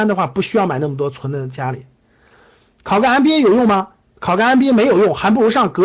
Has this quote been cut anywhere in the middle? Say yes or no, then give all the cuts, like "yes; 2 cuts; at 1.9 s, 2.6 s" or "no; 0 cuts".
no; 0 cuts